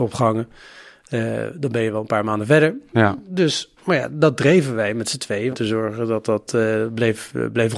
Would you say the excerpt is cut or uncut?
cut